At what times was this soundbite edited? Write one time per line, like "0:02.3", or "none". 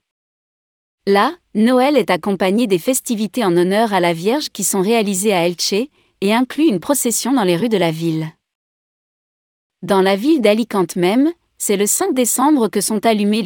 0:01.0